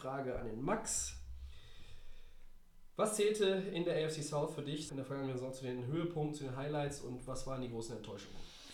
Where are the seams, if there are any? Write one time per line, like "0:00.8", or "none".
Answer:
0:04.9